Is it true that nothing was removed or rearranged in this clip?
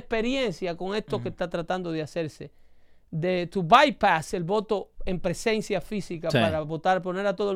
yes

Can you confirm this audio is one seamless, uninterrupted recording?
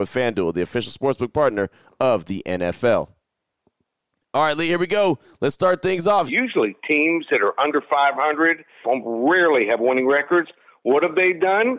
no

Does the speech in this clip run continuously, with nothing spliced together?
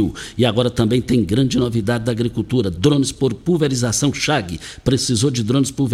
yes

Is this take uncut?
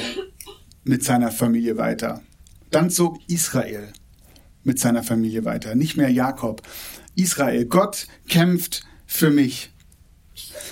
yes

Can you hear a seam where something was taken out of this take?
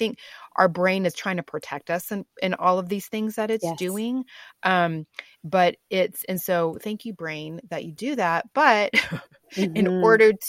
no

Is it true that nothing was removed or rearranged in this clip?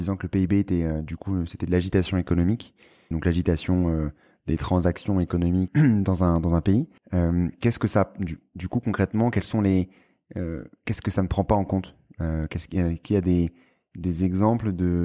no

